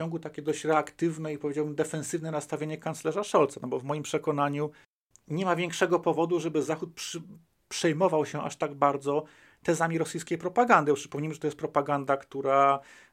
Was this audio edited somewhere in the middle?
no; 0 cuts

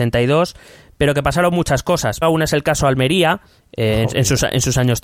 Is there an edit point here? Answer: yes; 2 cuts; at 2.2 s, 3.6 s

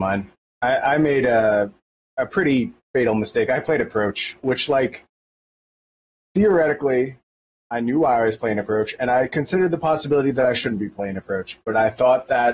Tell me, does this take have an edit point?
no; 0 cuts

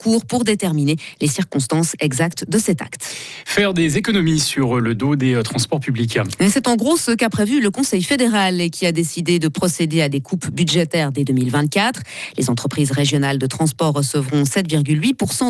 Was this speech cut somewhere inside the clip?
no; 0 cuts

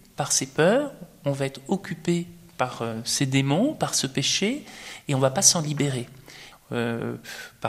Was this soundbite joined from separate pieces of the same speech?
yes; 1 cut; at 6.5 s

